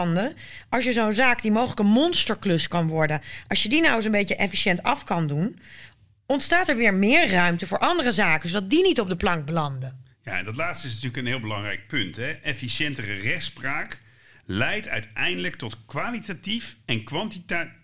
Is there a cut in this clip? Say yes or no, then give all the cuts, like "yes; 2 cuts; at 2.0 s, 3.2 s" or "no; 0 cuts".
no; 0 cuts